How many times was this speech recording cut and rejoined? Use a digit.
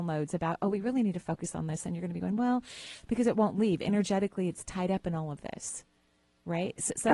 1